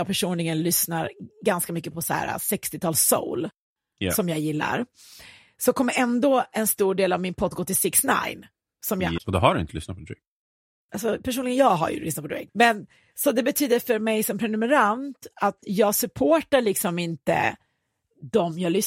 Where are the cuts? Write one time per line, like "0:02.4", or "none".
0:09.2
0:12.5